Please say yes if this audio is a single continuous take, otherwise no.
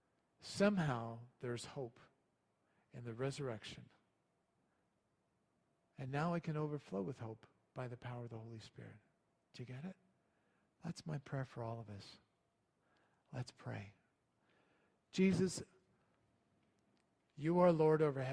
yes